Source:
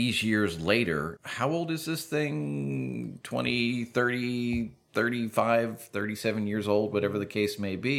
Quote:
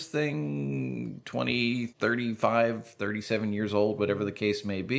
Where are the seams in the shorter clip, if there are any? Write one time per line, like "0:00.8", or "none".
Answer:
0:01.9